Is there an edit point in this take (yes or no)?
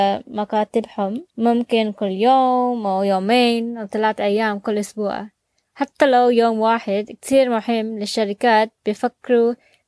yes